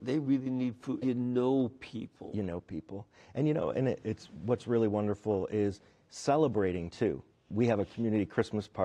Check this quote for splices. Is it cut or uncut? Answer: cut